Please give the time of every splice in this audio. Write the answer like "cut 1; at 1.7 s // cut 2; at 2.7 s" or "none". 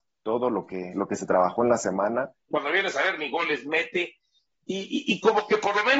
cut 1; at 2.5 s // cut 2; at 4.5 s